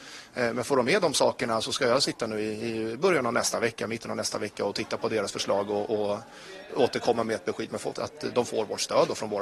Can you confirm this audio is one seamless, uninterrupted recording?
no; 2 cuts; at 6.7 s, 7.9 s

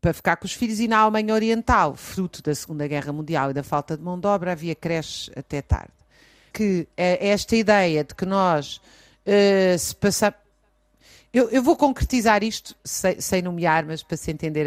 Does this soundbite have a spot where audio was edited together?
yes; 1 cut; at 6.5 s

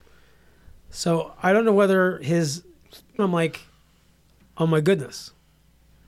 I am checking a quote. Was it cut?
yes; 1 cut; at 3.2 s

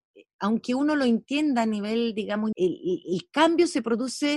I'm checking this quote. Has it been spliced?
yes; 1 cut; at 2.5 s

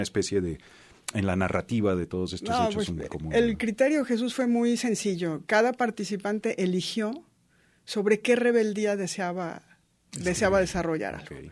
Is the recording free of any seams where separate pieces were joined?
yes; 0 cuts

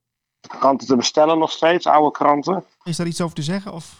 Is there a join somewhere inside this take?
yes; 1 cut; at 2.9 s

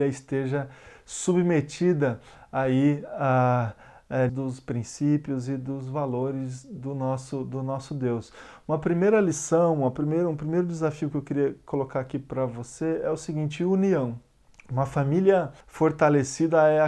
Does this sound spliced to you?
yes; 3 cuts; at 4.3 s, 14.5 s, 15.6 s

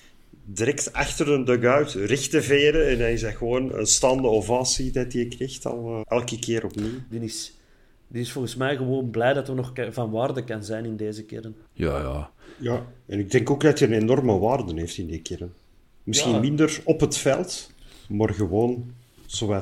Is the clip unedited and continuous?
no; 3 cuts; at 6.0 s, 7.1 s, 11.6 s

